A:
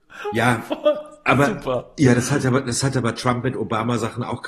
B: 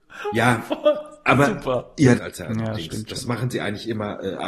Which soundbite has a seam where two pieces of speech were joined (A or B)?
B